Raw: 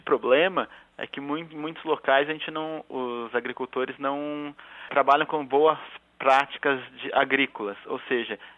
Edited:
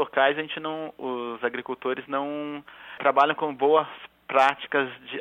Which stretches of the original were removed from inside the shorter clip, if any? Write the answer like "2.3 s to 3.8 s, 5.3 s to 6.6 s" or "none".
none